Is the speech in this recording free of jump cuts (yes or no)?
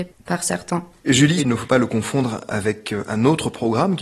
no